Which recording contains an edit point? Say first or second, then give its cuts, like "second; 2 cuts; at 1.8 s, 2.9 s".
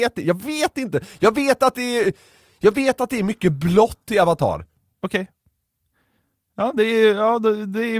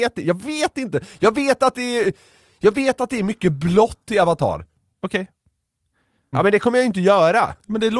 second; 1 cut; at 6.3 s